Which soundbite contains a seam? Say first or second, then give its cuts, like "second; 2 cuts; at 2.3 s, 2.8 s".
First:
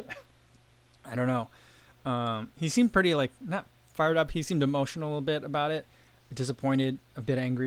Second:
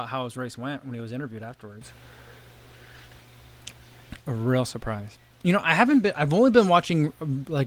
second; 1 cut; at 4.2 s